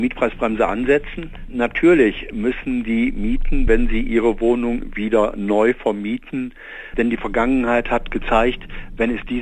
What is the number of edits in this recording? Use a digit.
2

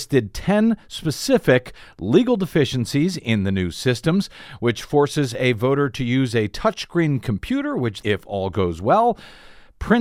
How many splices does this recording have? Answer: 1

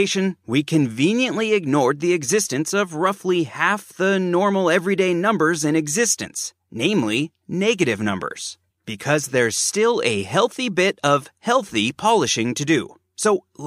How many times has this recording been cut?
1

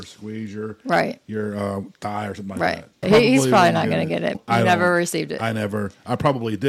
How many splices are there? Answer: 2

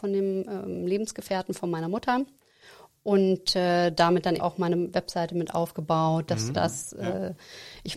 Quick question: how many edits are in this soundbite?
2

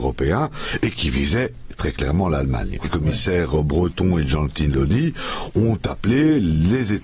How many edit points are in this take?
1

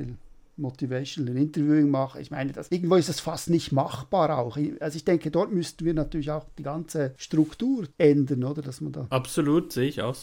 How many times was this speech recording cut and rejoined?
0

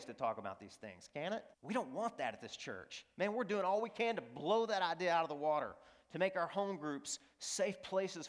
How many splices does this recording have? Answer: 1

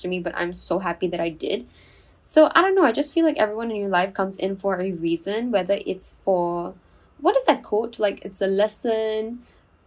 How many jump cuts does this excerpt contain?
0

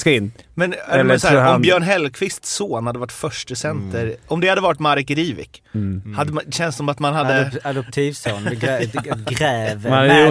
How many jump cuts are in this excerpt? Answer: 0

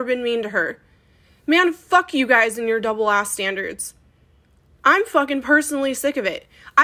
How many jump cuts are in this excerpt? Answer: 0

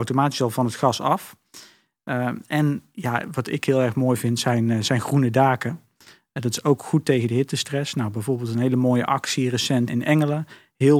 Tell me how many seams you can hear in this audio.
1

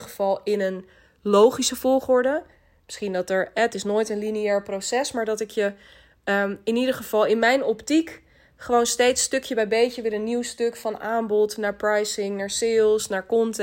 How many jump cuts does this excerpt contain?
0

